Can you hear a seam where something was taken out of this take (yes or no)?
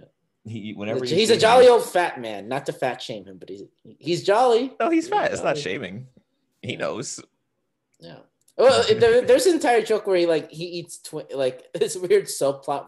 no